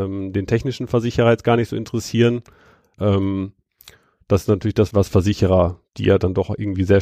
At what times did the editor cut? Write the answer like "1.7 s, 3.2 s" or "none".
2.9 s, 4.9 s